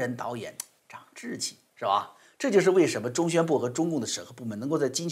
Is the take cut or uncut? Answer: uncut